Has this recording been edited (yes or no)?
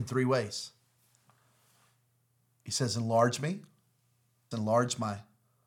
yes